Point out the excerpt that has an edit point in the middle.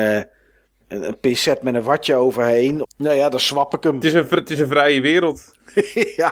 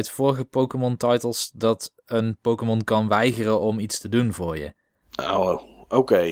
first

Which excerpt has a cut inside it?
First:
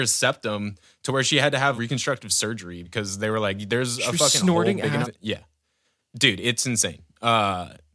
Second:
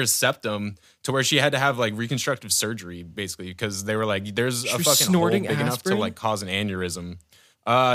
first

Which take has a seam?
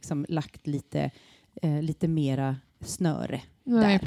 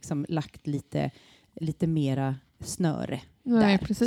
second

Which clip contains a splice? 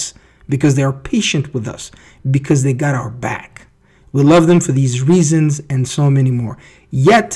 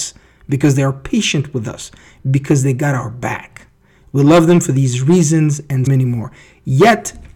second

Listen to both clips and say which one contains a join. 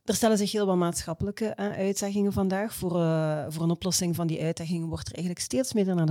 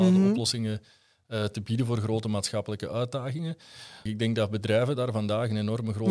second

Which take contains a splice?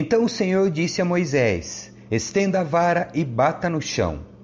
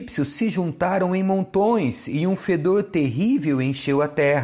first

